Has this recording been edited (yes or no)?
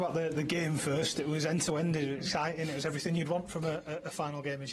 no